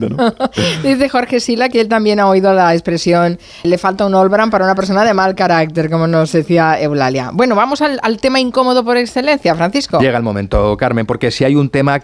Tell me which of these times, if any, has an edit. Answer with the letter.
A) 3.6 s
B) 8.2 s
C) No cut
A